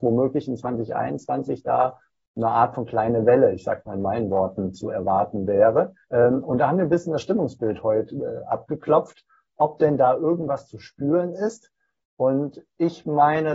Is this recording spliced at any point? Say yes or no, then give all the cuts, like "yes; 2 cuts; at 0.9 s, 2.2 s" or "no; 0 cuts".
yes; 1 cut; at 6.0 s